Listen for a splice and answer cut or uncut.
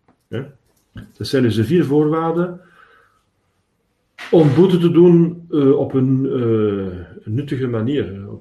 uncut